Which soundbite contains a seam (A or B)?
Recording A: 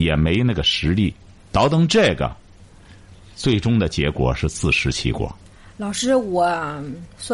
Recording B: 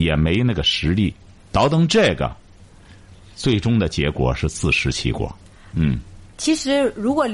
B